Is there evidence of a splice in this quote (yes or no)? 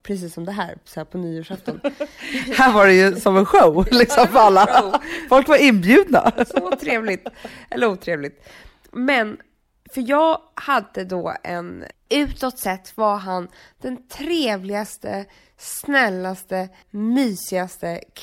yes